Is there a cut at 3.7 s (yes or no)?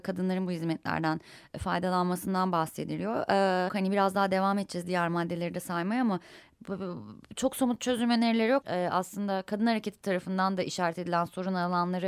yes